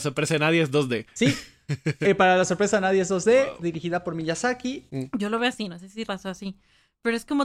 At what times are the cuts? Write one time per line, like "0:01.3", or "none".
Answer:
0:04.9
0:06.0